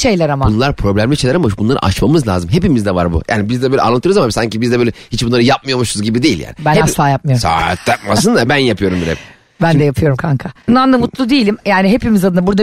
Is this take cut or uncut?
cut